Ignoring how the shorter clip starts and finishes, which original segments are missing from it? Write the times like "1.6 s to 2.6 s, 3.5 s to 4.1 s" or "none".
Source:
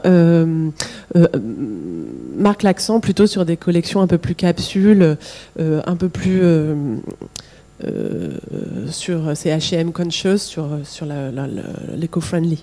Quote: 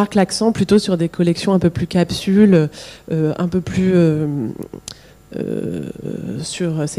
none